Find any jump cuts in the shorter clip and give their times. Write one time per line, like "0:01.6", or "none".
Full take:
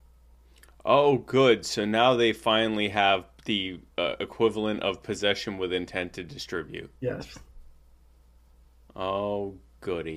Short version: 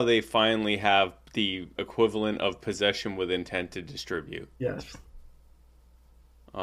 0:01.8